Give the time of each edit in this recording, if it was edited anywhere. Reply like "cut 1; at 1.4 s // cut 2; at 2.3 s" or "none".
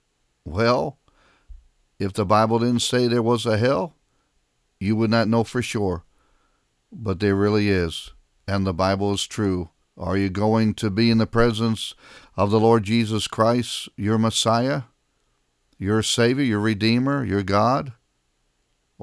cut 1; at 9.8 s